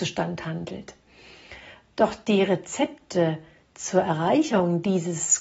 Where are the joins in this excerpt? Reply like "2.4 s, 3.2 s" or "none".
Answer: none